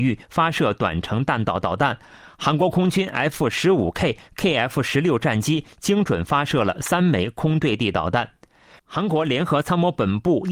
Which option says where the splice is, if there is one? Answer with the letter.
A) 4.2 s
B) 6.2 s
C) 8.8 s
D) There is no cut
C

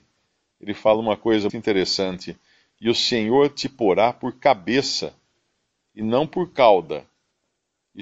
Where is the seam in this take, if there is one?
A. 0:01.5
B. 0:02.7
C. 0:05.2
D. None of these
A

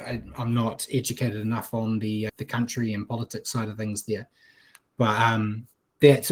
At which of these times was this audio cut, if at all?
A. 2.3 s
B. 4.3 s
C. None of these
A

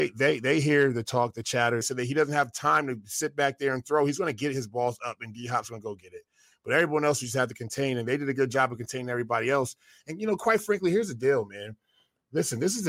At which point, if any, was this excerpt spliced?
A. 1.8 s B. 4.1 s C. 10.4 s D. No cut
A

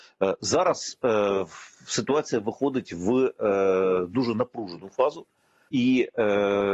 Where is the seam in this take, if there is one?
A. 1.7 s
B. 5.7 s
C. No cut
B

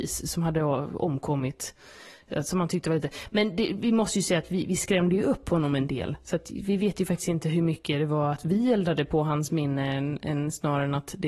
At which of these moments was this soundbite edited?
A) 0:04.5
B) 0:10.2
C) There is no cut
C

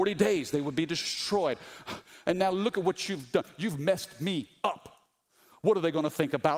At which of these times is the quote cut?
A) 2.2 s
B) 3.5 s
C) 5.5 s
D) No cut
D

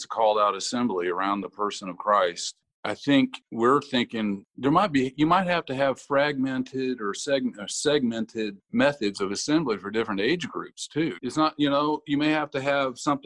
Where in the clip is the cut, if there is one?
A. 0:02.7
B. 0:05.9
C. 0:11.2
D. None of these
C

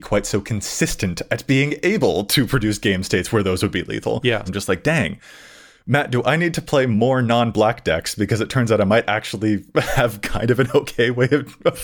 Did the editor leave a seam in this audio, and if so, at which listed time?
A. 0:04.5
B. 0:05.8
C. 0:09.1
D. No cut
A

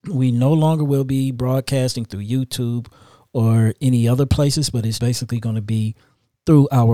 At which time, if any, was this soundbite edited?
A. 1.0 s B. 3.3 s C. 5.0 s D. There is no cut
C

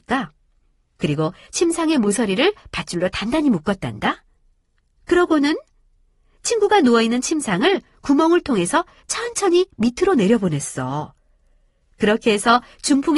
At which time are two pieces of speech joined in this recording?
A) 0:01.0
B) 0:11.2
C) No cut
A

